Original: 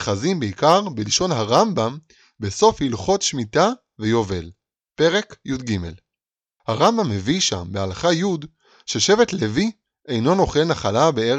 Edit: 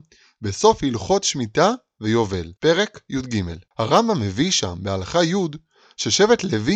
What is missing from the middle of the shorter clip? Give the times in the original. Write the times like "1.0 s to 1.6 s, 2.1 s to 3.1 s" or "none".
4.5 s to 4.9 s, 6.0 s to 6.6 s